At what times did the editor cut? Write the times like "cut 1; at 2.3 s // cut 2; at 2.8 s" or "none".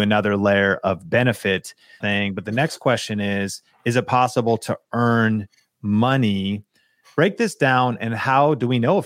cut 1; at 2.0 s